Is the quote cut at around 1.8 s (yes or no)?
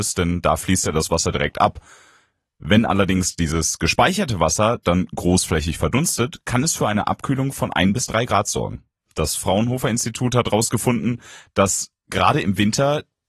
no